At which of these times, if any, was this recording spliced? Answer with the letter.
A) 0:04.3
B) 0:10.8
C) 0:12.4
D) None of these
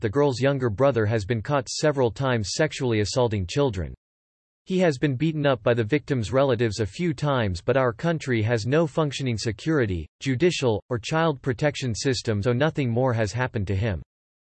C